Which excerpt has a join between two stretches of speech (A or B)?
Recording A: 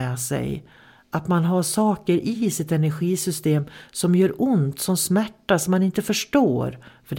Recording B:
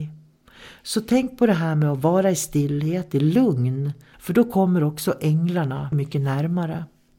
B